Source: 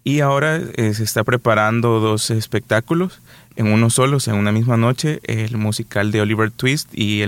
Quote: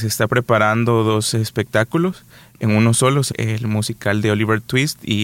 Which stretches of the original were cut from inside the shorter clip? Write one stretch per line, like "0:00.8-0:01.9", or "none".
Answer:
0:04.3-0:05.2